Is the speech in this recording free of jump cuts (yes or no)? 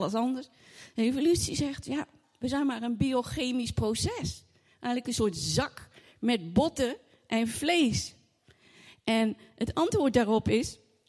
yes